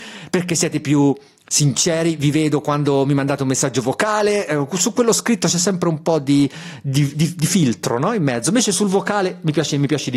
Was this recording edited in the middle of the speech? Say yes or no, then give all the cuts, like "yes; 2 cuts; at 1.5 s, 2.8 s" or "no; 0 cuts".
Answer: no; 0 cuts